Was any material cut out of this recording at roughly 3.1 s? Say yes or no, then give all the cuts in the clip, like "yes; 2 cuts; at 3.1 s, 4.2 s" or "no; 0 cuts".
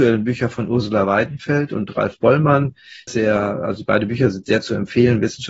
yes; 1 cut; at 3.1 s